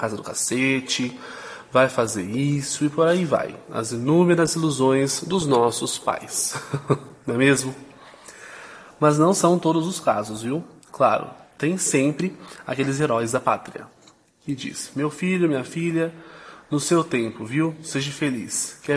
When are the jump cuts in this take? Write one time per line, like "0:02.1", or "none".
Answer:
none